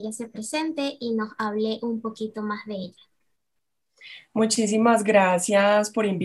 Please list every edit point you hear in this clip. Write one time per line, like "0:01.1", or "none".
none

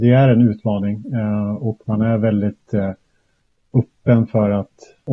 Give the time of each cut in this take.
none

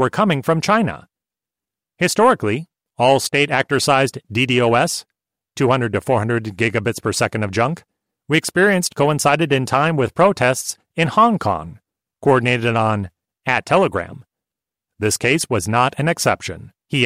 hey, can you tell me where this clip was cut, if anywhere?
none

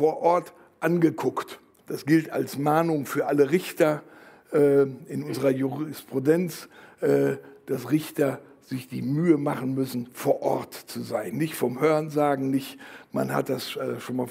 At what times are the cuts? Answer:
0:01.8

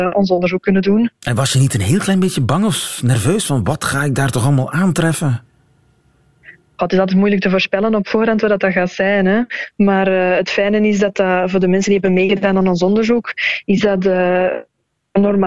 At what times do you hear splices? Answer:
none

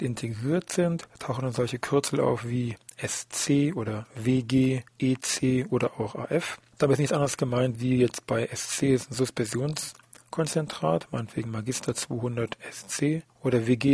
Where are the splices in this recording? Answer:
none

